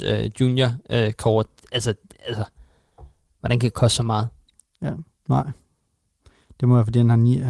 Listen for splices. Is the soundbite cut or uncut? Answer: cut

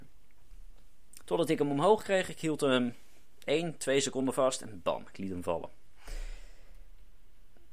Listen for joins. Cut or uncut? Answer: cut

